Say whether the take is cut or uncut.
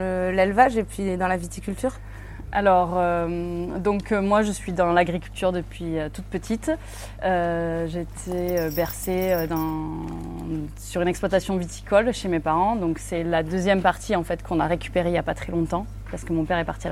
uncut